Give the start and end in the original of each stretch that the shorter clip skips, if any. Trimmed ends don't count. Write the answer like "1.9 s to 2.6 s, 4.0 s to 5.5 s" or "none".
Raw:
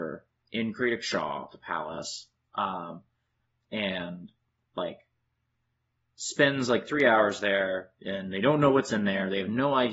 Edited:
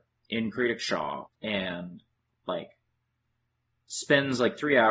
1.5 s to 3.6 s